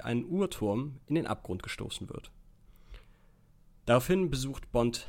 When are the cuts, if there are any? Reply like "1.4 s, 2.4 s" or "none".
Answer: none